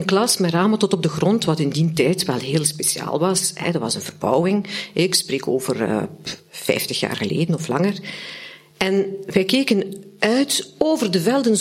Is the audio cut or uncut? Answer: uncut